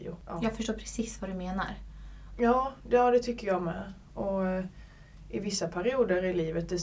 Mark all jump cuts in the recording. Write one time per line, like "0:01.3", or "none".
0:02.4